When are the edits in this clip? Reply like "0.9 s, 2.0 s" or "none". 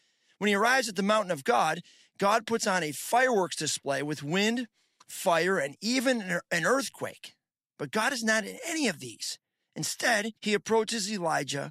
10.4 s

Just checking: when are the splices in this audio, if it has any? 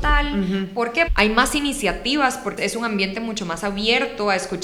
1.1 s, 2.6 s

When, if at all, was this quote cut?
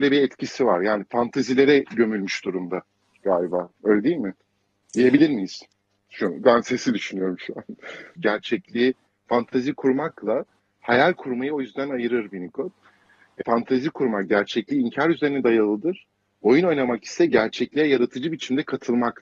8.1 s, 13.4 s

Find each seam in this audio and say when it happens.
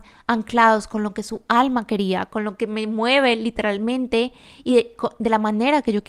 none

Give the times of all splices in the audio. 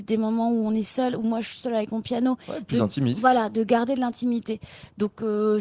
none

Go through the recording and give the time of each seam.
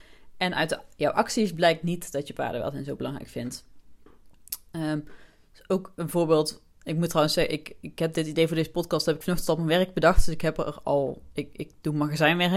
none

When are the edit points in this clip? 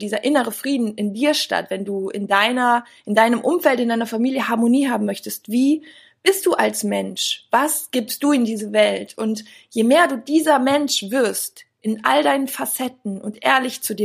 none

